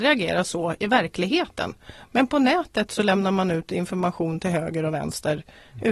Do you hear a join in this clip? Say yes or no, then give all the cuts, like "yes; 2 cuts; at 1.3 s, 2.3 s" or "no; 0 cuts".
no; 0 cuts